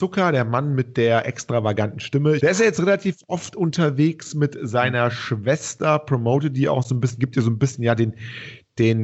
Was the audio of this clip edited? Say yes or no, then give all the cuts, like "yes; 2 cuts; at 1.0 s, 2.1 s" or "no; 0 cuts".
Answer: yes; 1 cut; at 2.4 s